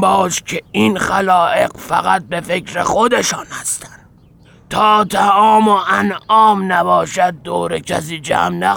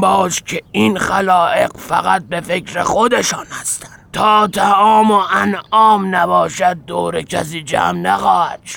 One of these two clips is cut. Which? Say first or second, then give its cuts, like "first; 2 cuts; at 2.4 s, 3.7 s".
second; 1 cut; at 4.0 s